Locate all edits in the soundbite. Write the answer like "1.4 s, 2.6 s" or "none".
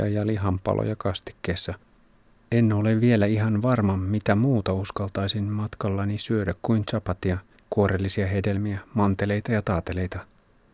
7.6 s